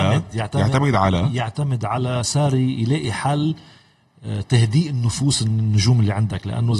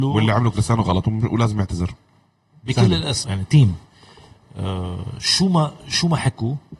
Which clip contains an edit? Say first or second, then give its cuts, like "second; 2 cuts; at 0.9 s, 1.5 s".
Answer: second; 1 cut; at 3.2 s